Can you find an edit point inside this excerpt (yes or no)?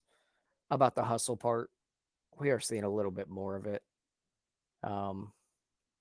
no